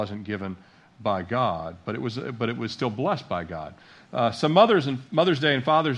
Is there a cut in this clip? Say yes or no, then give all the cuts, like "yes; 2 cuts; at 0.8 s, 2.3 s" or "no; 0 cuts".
no; 0 cuts